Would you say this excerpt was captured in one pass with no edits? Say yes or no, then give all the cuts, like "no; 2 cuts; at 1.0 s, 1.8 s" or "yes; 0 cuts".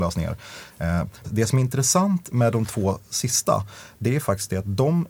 no; 2 cuts; at 1.2 s, 2.3 s